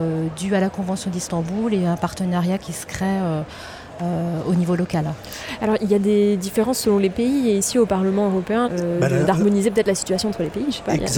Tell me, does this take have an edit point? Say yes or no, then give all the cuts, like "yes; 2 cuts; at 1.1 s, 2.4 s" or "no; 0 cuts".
yes; 1 cut; at 8.7 s